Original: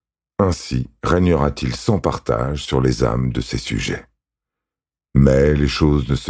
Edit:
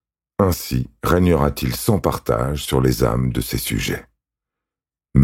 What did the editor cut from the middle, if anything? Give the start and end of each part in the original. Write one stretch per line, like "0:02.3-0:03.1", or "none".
none